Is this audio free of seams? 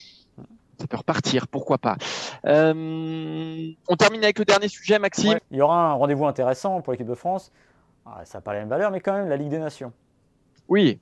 no; 1 cut; at 5.4 s

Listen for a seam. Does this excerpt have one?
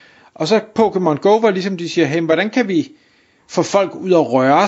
no; 0 cuts

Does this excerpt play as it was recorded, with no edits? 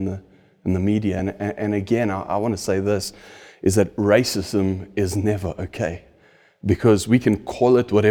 yes; 0 cuts

